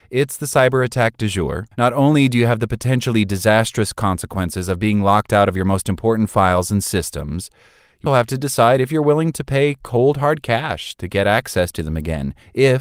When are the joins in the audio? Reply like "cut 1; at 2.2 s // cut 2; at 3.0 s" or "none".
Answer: cut 1; at 1.7 s // cut 2; at 8.1 s